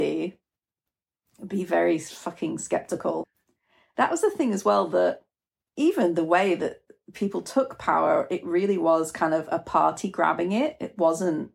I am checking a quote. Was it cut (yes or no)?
no